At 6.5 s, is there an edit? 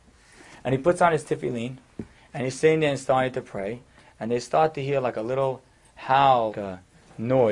yes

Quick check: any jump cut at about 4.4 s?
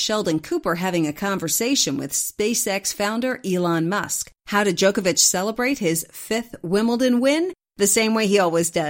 yes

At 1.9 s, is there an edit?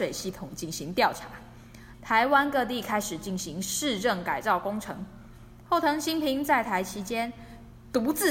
yes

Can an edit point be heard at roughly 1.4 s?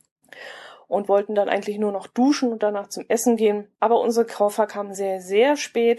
no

